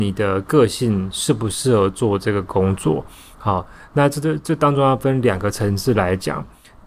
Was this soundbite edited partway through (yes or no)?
no